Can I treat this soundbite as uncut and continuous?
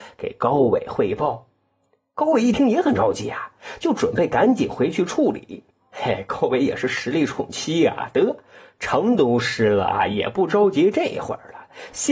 no; 1 cut; at 5.7 s

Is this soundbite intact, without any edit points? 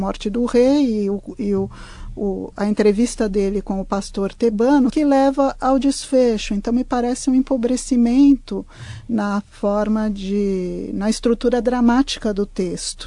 no; 1 cut; at 4.9 s

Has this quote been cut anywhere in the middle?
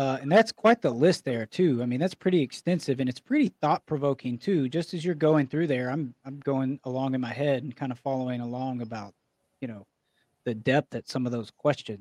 no; 0 cuts

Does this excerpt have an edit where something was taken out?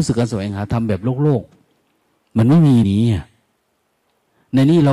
yes; 1 cut; at 2.8 s

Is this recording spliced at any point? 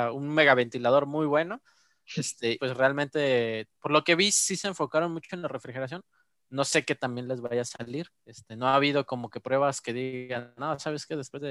yes; 1 cut; at 2.6 s

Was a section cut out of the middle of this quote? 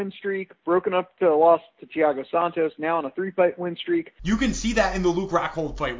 yes; 1 cut; at 4.2 s

